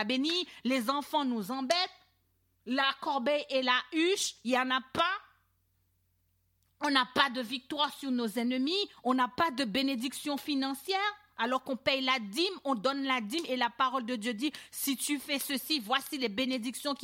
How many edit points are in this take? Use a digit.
0